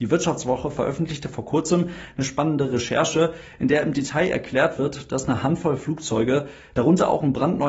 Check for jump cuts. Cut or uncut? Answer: uncut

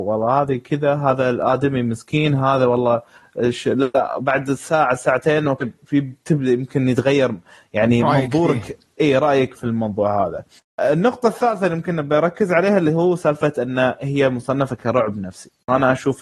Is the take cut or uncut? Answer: cut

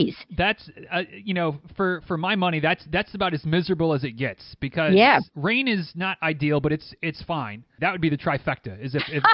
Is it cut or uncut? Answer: cut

